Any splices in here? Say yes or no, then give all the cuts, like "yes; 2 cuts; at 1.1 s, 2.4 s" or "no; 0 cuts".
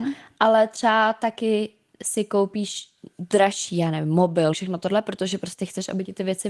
yes; 1 cut; at 4.5 s